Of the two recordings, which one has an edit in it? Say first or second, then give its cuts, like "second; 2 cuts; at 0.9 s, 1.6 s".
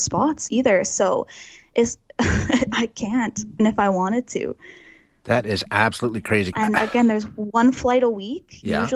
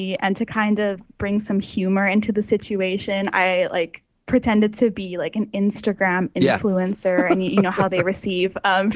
first; 2 cuts; at 3.6 s, 6.5 s